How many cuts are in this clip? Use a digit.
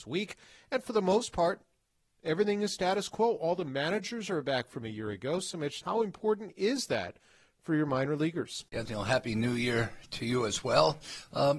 2